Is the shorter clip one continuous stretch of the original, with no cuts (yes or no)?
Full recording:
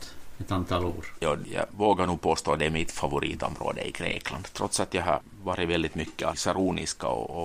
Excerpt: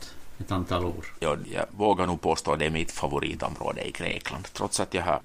yes